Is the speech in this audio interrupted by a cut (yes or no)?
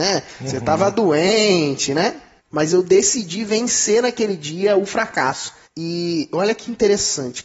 yes